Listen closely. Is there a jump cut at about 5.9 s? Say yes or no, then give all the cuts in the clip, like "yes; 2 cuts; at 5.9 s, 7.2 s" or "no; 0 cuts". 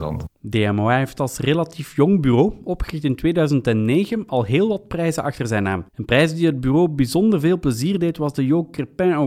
yes; 1 cut; at 5.9 s